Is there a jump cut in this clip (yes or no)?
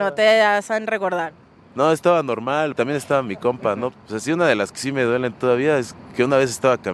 yes